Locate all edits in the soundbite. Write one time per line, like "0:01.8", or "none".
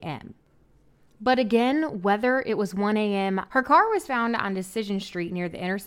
0:03.5